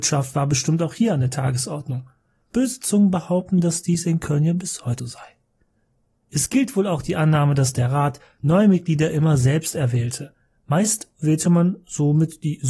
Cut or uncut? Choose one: cut